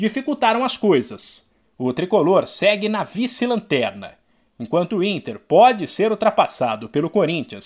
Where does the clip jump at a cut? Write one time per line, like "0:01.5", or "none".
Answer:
0:01.6